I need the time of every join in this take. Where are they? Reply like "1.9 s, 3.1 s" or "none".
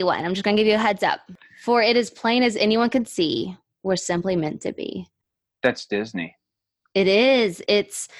none